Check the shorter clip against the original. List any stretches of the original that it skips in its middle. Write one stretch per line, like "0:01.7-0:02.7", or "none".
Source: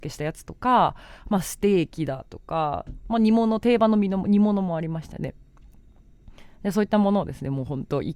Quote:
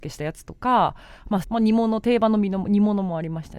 0:01.4-0:03.0